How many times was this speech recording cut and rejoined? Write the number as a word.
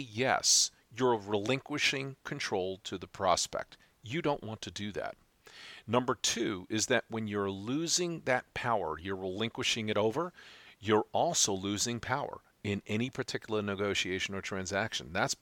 zero